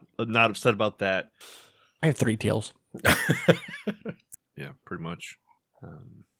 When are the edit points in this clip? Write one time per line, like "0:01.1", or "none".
0:01.4
0:04.4